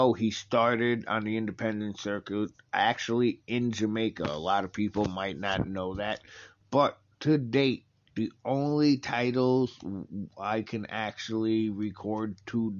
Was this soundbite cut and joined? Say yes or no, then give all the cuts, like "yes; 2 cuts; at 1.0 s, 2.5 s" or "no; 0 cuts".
no; 0 cuts